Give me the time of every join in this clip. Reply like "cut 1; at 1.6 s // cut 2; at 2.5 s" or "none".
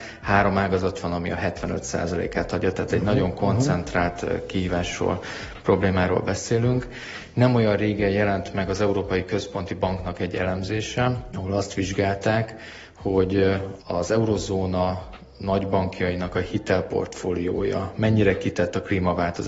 none